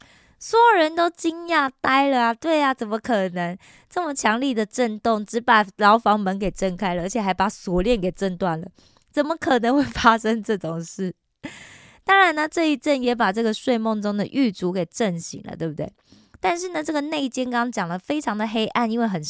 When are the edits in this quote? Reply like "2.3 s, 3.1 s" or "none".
none